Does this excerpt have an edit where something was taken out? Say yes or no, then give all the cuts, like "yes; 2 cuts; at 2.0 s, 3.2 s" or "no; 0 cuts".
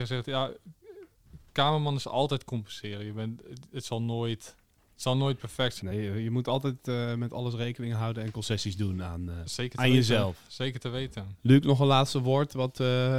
no; 0 cuts